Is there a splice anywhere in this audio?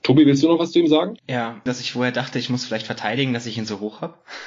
yes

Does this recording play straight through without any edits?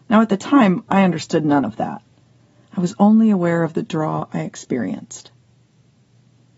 yes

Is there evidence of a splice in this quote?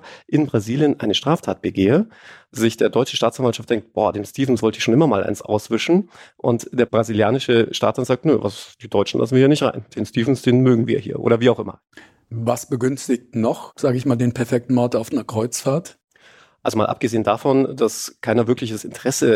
no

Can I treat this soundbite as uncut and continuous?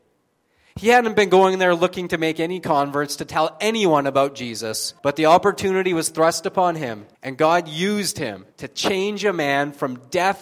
no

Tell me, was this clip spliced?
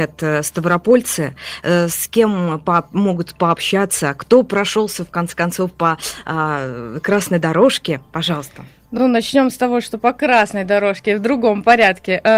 no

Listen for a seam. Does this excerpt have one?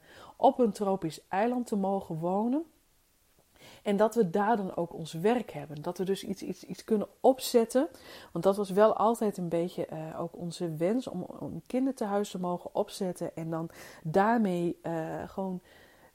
no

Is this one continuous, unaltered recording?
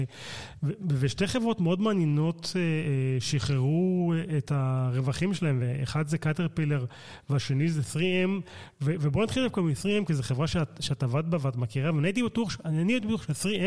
yes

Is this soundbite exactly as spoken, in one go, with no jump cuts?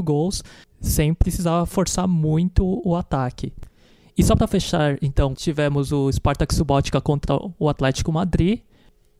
no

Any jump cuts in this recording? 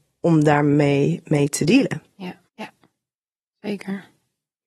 yes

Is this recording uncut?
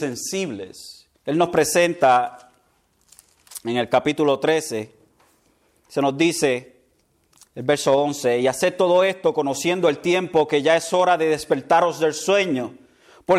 no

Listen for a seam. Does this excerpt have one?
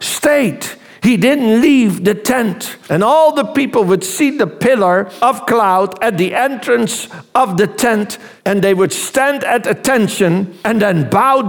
yes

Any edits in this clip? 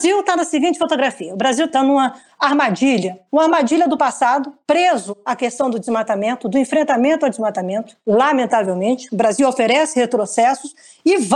no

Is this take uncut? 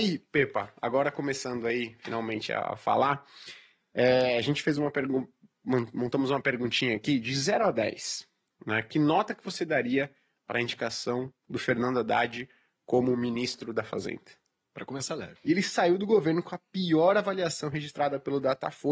no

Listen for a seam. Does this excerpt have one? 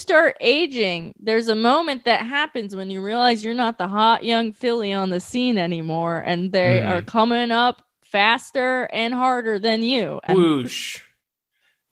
yes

